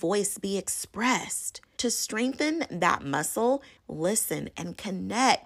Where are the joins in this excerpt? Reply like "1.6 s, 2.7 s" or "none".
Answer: 1.8 s, 3.8 s